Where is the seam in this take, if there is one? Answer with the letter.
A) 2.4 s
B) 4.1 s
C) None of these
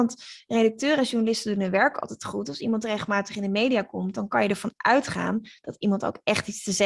C